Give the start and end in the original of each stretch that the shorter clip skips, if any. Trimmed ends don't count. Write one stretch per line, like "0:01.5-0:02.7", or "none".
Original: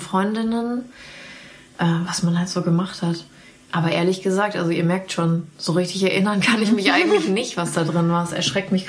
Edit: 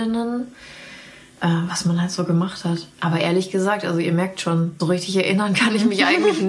0:03.3-0:03.7
0:05.5-0:05.7